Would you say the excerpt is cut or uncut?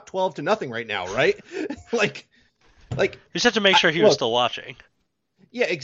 uncut